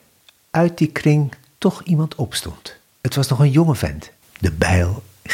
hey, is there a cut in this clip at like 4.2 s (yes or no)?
yes